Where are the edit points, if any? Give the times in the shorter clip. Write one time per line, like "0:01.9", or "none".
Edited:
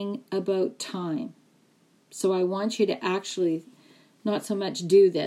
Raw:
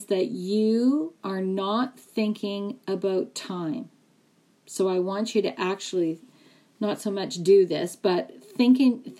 none